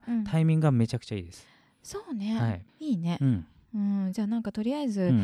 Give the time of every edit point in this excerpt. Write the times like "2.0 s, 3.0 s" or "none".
2.7 s